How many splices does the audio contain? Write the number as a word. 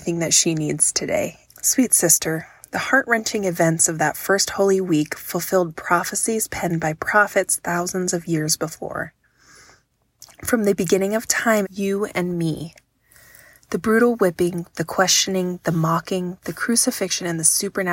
two